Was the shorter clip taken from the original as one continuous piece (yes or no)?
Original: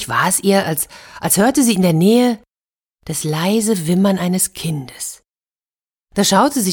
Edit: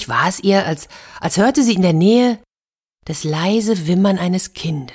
yes